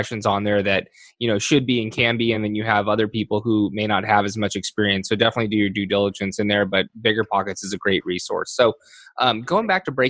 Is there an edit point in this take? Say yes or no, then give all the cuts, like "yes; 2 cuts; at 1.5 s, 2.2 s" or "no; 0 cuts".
no; 0 cuts